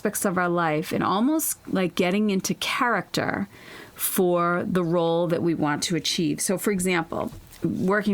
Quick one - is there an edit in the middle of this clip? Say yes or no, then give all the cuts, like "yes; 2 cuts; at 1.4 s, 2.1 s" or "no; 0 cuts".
no; 0 cuts